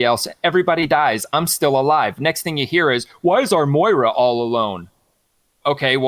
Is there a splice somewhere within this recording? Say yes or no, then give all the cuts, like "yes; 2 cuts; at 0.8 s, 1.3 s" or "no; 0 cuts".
no; 0 cuts